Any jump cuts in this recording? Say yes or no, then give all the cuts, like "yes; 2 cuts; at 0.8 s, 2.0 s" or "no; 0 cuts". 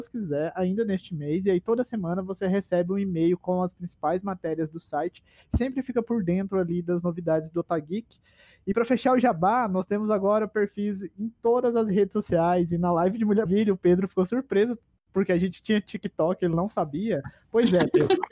yes; 1 cut; at 13.5 s